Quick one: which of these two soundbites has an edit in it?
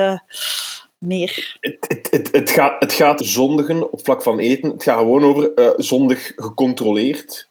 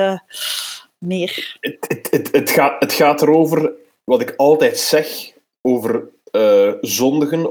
first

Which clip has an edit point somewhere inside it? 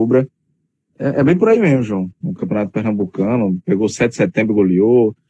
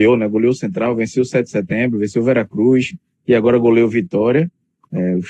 first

